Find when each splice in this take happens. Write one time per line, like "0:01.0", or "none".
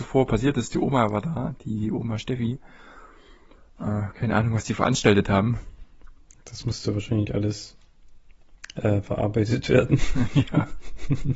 none